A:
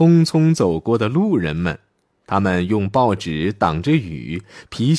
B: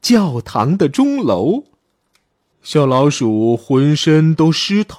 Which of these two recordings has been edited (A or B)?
B